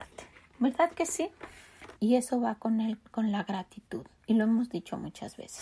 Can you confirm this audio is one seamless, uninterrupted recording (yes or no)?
no